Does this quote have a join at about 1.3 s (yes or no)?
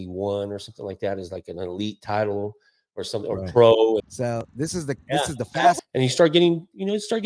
no